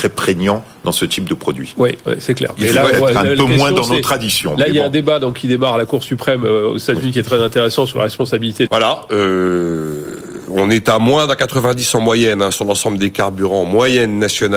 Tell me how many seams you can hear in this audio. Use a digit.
1